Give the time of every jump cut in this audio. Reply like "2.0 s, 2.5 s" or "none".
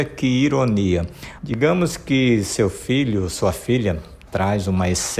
1.4 s